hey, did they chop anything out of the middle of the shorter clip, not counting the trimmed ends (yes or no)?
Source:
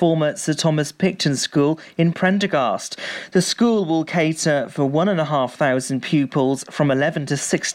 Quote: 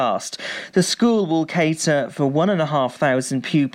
no